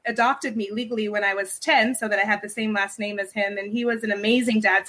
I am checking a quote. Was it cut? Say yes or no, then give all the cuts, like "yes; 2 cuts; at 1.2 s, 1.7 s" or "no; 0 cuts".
no; 0 cuts